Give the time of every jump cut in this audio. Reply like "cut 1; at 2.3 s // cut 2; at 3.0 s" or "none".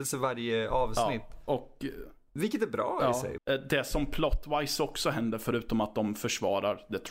cut 1; at 3.4 s